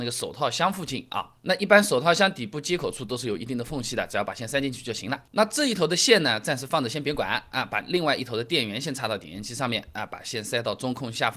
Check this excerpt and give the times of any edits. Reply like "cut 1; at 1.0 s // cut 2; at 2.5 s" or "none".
cut 1; at 1.4 s